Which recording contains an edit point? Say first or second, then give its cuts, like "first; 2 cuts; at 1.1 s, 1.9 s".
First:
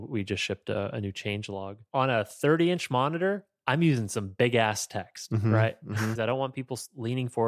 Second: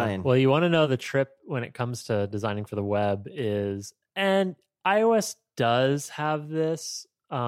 first; 1 cut; at 6.2 s